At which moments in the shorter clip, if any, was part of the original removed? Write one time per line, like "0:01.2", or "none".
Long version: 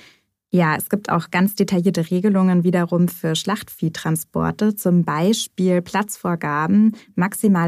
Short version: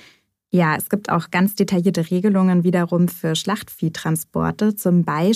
none